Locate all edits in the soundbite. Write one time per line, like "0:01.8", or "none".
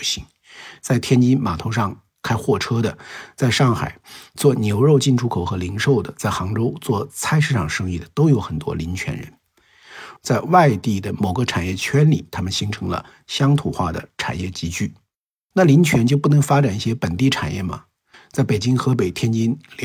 0:10.2
0:15.5
0:18.1